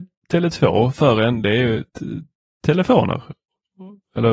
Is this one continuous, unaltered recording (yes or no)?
no